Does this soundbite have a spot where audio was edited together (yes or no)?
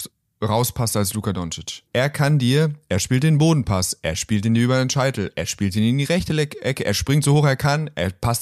yes